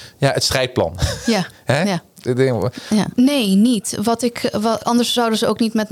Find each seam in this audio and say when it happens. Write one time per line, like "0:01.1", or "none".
0:03.1
0:04.8

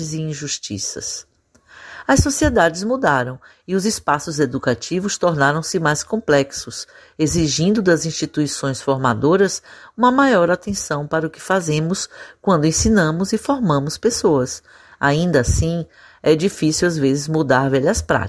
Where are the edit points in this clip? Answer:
none

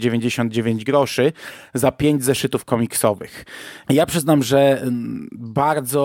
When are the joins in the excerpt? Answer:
0:03.8

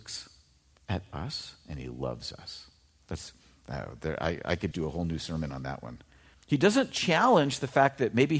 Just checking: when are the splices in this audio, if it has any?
0:04.7
0:06.3

